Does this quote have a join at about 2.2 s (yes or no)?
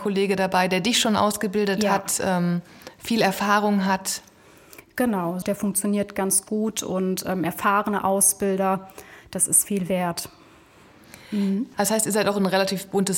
no